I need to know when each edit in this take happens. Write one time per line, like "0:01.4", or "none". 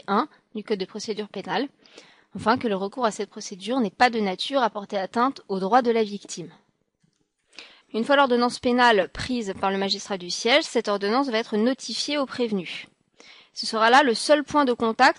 0:07.8